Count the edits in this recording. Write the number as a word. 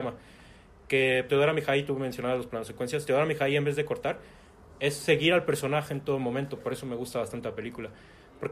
one